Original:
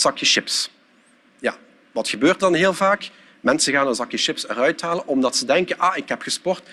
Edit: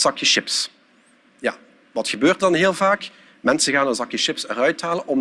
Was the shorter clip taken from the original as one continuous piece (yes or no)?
yes